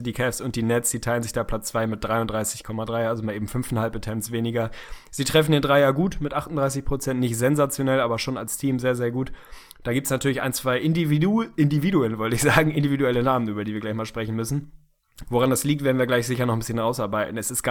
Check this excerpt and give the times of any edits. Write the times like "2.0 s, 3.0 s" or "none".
15.2 s